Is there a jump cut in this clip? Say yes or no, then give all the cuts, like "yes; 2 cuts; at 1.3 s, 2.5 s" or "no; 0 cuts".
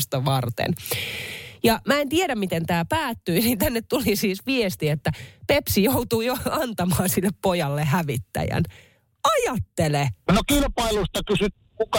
yes; 1 cut; at 10.3 s